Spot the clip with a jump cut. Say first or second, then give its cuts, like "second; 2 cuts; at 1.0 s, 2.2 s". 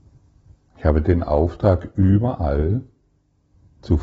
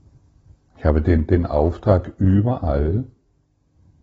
first; 1 cut; at 1.0 s